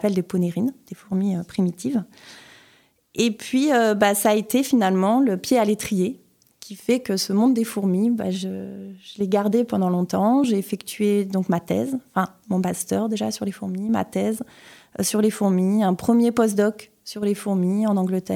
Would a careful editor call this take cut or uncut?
uncut